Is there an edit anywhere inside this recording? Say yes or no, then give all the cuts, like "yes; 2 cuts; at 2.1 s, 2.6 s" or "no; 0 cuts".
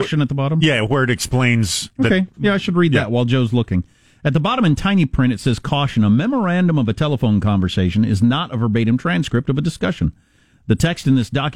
no; 0 cuts